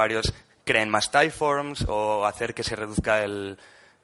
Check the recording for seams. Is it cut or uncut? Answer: uncut